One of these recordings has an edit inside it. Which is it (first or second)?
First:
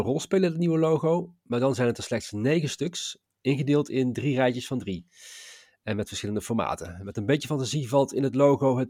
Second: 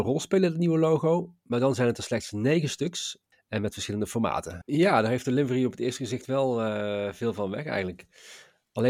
second